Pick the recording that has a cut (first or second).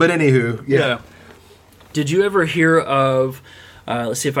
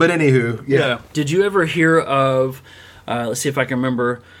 second